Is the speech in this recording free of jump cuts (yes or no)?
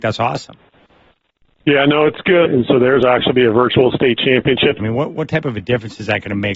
no